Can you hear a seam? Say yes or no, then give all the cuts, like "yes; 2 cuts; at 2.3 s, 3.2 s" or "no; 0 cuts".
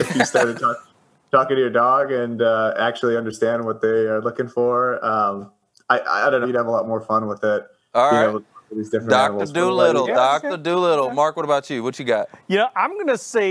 yes; 1 cut; at 6.4 s